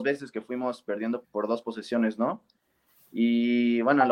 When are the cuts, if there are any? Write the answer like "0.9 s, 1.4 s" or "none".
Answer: 1.2 s